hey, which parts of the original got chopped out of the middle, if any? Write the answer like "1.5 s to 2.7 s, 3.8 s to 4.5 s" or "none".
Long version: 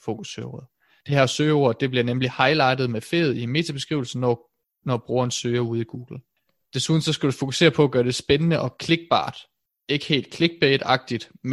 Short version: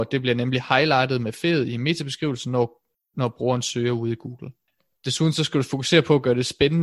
none